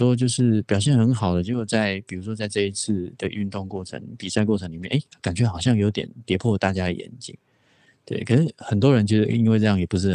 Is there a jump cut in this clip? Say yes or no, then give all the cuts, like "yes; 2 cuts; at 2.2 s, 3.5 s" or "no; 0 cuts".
no; 0 cuts